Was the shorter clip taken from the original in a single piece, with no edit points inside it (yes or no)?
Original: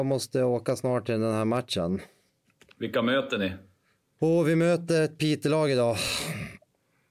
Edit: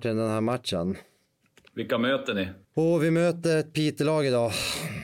no